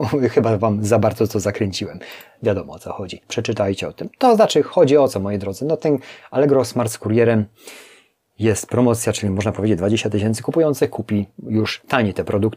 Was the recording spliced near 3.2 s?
yes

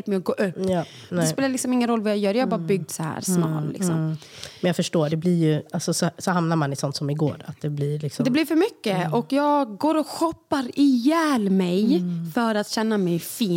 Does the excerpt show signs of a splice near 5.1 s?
yes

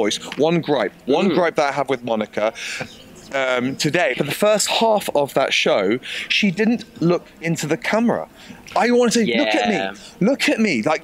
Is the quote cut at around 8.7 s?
no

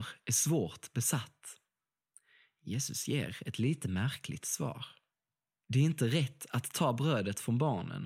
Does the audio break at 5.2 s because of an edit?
no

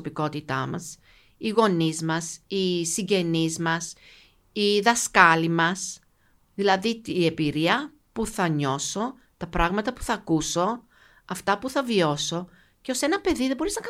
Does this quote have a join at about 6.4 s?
no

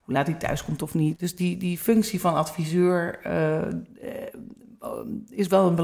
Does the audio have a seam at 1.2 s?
yes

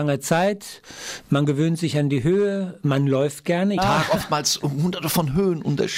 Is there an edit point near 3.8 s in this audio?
yes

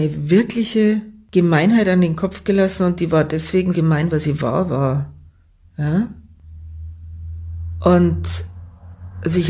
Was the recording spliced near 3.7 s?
yes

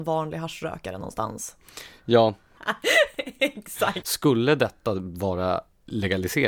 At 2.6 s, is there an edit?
yes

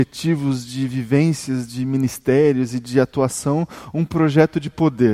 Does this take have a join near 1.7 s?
no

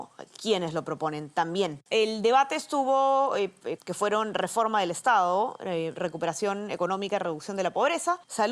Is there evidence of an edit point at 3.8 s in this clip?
yes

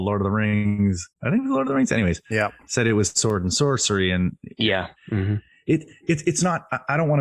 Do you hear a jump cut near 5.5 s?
no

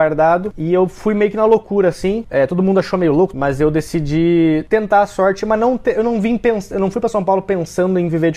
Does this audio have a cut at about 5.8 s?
no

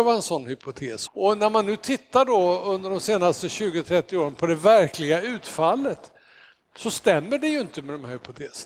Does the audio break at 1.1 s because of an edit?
yes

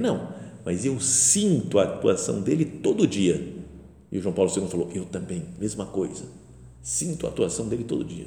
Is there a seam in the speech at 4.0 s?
no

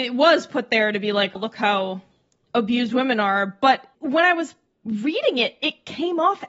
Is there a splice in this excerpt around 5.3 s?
no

